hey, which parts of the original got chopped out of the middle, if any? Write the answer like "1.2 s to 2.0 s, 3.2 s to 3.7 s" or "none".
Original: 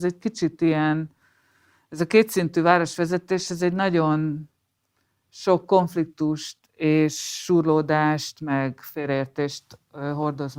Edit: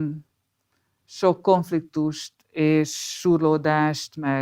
none